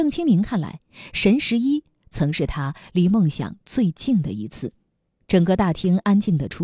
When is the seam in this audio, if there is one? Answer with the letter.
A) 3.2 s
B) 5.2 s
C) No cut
B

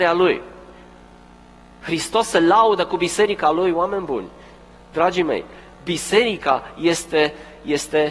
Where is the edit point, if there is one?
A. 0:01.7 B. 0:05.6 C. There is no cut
C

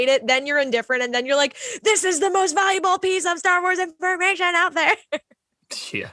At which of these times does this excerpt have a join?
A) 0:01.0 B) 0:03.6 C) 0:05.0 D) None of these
D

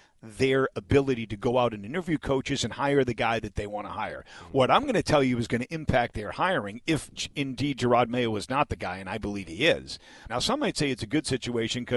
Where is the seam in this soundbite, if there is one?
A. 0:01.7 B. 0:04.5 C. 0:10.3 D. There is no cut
C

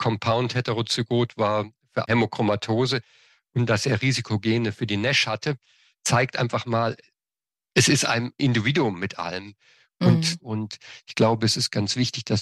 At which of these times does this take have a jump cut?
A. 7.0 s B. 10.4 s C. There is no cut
B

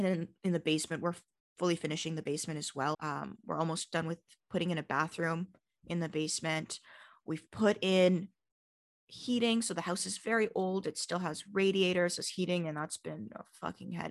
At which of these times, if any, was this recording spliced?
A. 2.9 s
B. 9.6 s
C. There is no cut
A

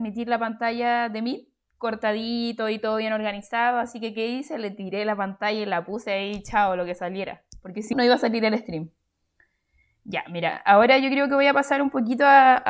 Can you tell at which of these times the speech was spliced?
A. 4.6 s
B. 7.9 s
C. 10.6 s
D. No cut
B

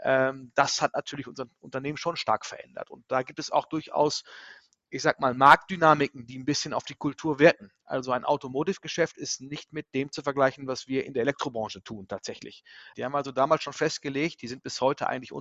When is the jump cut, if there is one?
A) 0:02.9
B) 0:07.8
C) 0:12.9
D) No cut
C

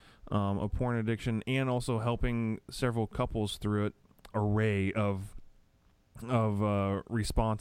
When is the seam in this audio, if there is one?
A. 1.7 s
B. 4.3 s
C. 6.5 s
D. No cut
B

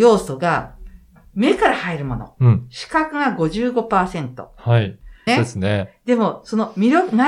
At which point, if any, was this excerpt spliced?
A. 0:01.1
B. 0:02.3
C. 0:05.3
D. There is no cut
C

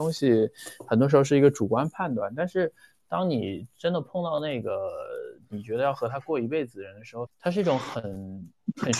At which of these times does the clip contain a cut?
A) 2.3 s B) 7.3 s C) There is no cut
B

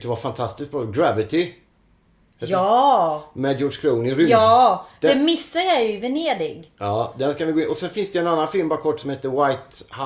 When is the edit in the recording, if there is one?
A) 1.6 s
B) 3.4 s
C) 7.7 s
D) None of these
D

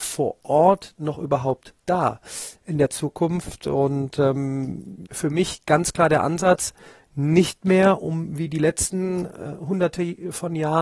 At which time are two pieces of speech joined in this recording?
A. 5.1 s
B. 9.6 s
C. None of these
A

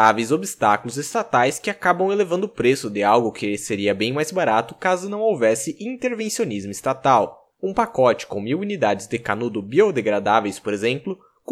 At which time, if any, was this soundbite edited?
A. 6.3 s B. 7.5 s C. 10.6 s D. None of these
B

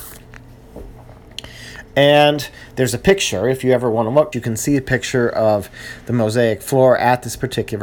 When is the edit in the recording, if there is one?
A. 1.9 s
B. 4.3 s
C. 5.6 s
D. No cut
B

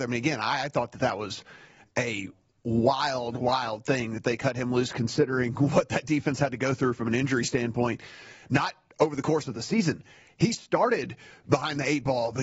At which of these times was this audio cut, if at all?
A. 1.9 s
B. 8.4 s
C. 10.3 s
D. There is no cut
D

